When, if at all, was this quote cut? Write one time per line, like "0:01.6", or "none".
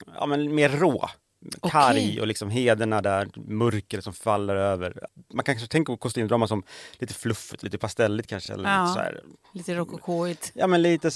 none